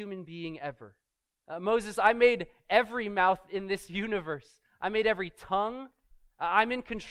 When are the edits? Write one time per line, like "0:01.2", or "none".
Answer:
0:01.3